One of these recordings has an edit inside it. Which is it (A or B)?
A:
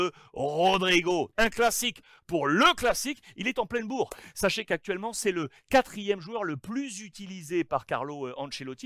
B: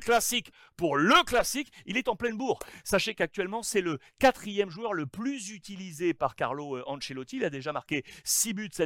A